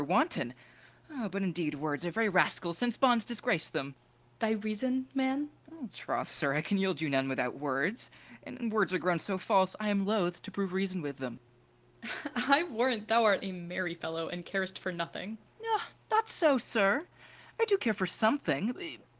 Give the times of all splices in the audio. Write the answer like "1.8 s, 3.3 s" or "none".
none